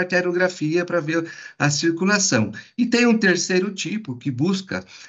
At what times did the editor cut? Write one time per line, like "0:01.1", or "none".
none